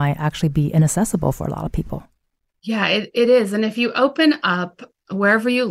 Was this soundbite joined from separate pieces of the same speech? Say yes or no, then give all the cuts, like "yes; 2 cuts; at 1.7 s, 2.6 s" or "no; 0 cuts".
no; 0 cuts